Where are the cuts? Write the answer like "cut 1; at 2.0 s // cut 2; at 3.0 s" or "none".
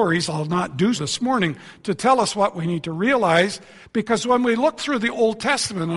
cut 1; at 1.0 s // cut 2; at 3.8 s